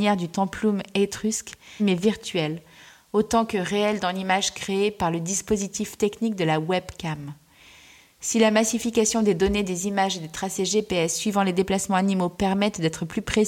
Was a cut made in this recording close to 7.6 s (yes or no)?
no